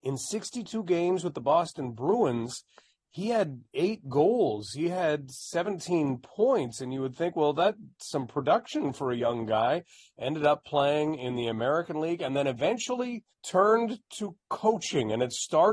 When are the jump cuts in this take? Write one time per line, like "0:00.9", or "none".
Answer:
0:13.3

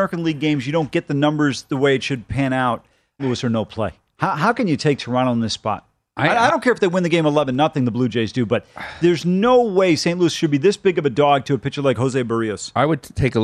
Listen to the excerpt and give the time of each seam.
0:03.2

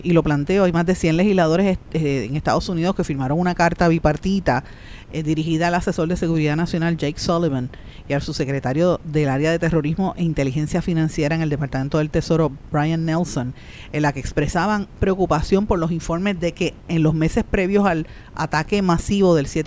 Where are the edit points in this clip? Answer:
none

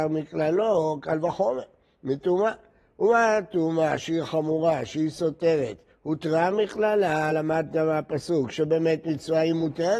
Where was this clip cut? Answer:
none

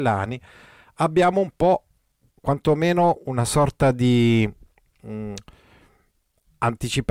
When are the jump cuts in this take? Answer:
none

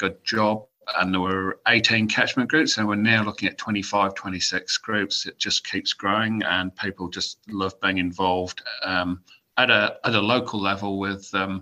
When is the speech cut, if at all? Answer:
none

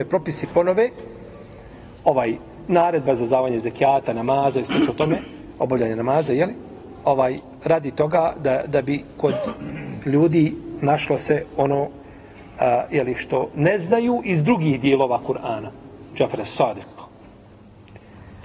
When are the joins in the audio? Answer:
0:16.1

